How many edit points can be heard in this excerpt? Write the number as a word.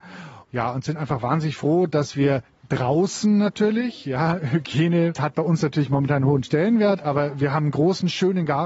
zero